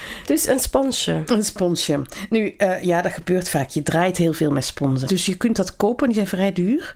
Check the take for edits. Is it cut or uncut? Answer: cut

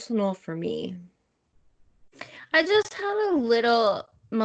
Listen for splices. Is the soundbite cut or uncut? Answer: uncut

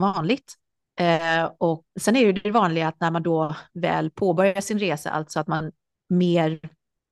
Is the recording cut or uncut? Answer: cut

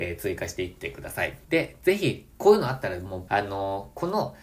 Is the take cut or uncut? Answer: cut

